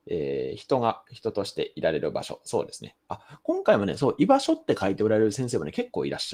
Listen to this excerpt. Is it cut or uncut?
uncut